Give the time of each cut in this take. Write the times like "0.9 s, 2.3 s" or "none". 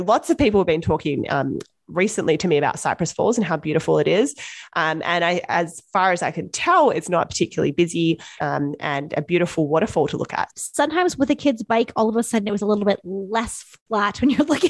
8.4 s, 10.5 s